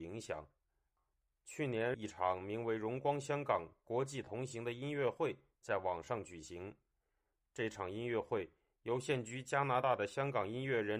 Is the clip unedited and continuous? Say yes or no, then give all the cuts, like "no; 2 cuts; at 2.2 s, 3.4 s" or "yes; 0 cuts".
yes; 0 cuts